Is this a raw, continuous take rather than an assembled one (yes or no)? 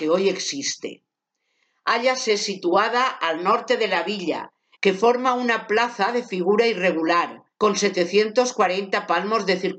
no